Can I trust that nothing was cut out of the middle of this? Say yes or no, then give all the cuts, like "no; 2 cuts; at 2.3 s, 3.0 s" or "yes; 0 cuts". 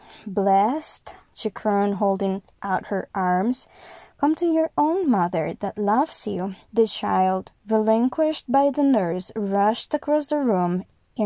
no; 2 cuts; at 1.3 s, 6.6 s